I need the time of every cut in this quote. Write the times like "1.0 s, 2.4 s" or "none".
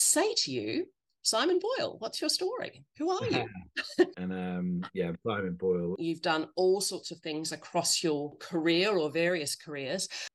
4.1 s, 6.0 s